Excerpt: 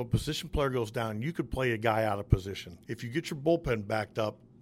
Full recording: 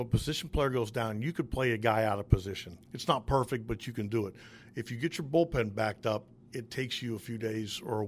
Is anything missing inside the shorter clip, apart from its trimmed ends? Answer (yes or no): yes